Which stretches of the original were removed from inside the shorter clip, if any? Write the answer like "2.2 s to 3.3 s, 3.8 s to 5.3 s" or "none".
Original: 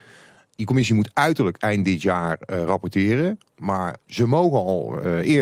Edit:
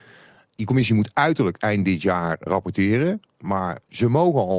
2.5 s to 2.6 s